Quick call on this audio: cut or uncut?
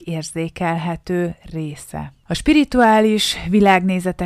uncut